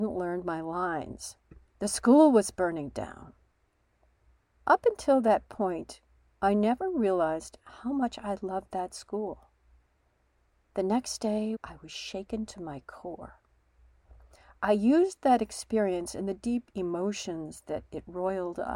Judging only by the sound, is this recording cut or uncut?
cut